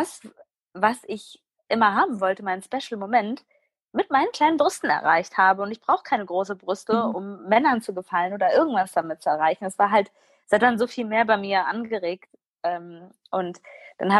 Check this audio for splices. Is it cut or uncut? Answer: uncut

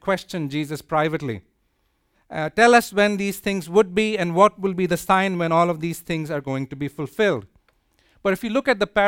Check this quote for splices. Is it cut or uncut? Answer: cut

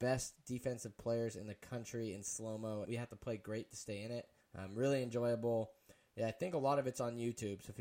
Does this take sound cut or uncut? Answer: cut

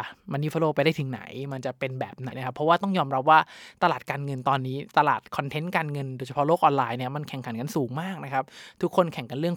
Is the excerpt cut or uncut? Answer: cut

